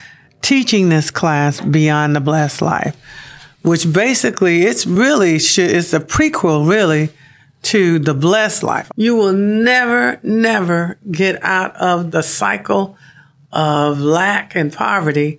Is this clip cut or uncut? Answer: cut